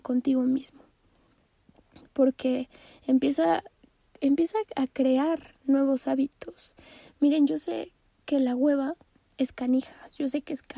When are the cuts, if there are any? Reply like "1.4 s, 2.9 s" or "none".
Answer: none